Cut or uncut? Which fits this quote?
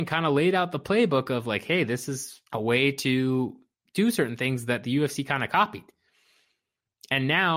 cut